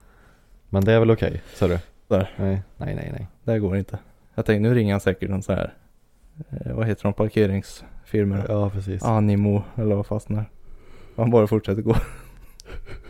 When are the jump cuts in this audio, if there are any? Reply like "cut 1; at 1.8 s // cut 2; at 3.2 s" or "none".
cut 1; at 2.1 s

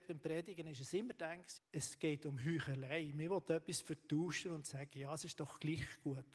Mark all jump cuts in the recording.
cut 1; at 1.6 s

